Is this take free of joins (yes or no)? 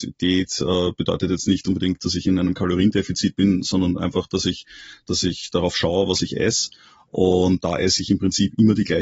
no